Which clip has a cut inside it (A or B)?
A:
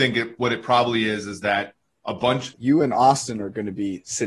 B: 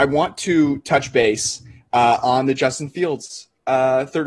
A